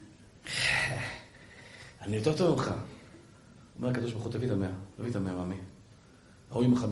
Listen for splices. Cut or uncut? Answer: uncut